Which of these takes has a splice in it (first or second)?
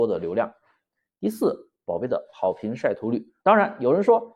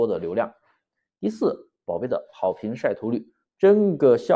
first